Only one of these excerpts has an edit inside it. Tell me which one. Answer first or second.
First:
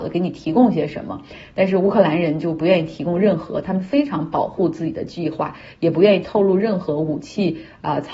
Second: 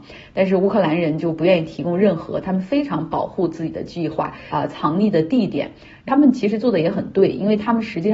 second